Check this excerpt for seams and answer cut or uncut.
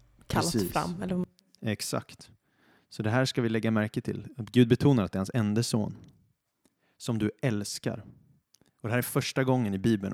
uncut